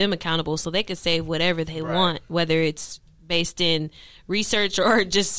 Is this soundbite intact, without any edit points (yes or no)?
yes